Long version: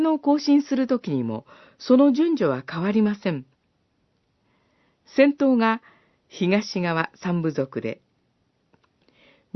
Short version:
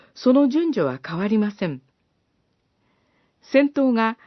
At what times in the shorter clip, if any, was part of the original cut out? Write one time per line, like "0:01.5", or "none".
none